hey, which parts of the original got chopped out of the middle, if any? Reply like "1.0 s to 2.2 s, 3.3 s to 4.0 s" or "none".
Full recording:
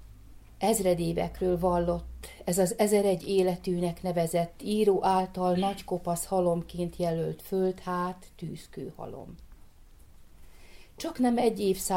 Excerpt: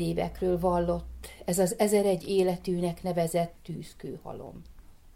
4.6 s to 8.3 s